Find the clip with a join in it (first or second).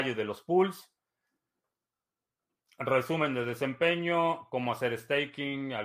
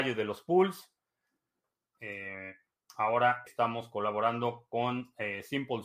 second